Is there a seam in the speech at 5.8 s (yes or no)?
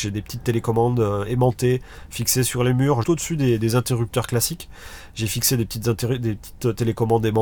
no